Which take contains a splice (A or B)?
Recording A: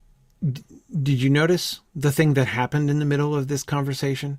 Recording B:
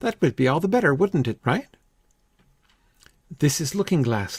B